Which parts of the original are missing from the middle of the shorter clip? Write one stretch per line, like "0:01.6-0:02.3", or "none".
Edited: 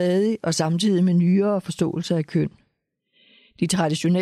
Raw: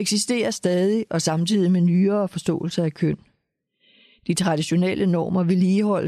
none